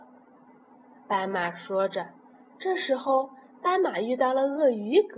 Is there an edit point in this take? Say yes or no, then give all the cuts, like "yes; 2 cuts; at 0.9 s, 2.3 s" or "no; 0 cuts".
no; 0 cuts